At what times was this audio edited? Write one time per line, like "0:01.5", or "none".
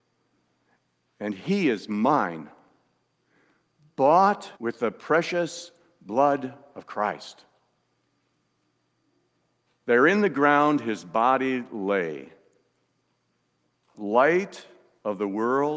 0:04.6
0:09.7